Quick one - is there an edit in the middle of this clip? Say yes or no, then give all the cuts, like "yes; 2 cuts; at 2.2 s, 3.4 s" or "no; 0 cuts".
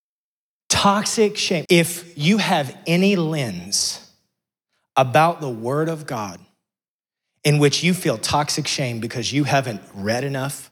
yes; 1 cut; at 1.6 s